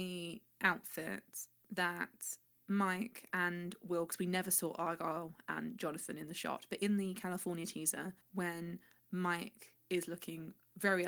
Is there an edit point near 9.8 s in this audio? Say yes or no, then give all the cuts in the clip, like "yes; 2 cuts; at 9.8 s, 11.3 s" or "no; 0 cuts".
yes; 2 cuts; at 8.2 s, 9.8 s